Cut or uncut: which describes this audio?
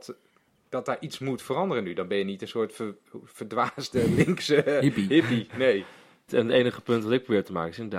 cut